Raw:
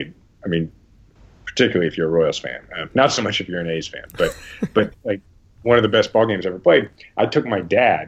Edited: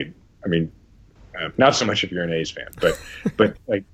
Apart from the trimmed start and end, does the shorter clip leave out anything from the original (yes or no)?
yes